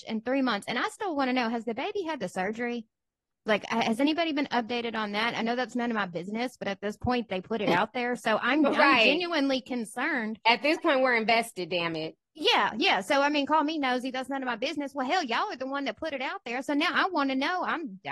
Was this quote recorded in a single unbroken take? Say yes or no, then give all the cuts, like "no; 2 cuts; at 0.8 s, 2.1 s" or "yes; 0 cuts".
yes; 0 cuts